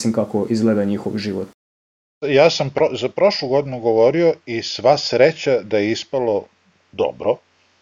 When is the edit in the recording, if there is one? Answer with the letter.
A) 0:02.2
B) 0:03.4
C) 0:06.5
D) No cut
D